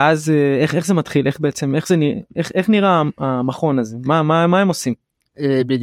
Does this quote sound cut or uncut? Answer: uncut